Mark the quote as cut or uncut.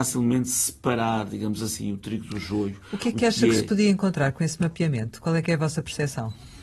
uncut